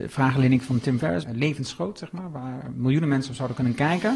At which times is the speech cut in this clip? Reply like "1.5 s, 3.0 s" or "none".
1.2 s